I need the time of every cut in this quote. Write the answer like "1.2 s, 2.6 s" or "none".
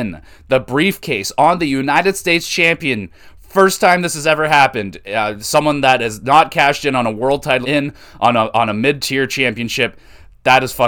7.6 s

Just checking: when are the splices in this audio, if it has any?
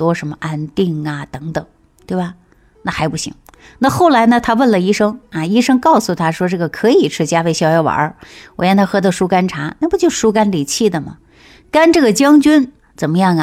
none

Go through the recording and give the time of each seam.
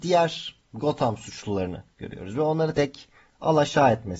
2.7 s

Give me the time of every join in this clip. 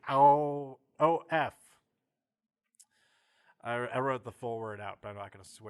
none

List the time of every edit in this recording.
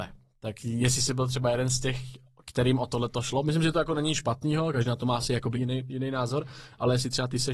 5.5 s

